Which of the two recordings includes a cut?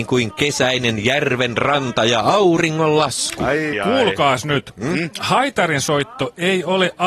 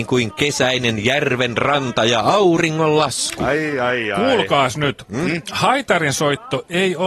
first; 1 cut; at 3.7 s

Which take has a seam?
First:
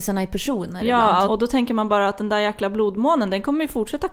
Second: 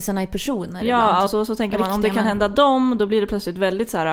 first; 1 cut; at 1.3 s

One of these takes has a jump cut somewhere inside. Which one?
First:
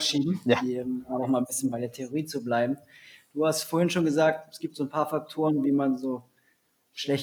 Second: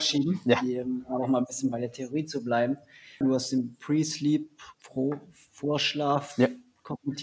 second; 2 cuts; at 3.2 s, 4.7 s

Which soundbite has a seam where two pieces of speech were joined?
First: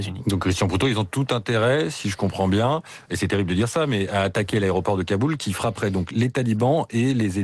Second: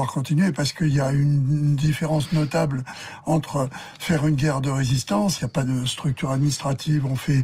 second; 1 cut; at 5.4 s

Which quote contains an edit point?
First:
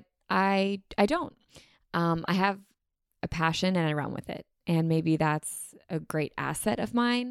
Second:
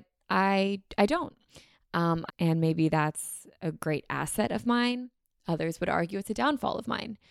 second; 1 cut; at 2.3 s

